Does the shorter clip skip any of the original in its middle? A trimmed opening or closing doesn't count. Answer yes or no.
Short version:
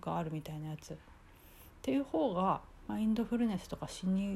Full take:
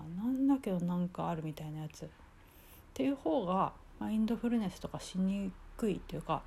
no